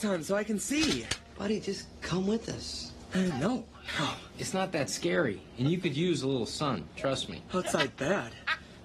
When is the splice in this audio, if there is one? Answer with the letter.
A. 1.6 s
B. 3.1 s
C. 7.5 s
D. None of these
D